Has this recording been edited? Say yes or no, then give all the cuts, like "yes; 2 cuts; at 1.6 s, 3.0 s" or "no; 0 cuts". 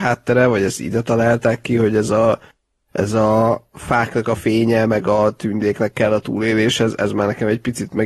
no; 0 cuts